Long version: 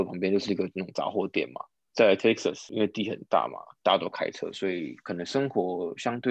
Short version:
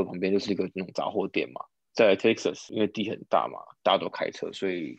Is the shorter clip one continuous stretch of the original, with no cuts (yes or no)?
yes